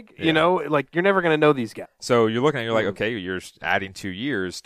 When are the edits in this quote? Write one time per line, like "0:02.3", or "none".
0:01.8